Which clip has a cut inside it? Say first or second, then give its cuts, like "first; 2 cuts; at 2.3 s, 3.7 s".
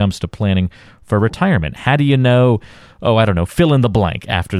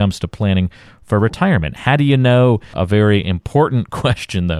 second; 1 cut; at 2.7 s